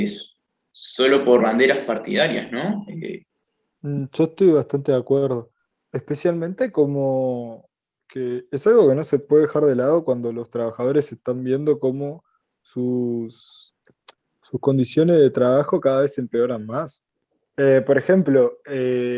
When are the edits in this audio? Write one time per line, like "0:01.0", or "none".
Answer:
0:03.7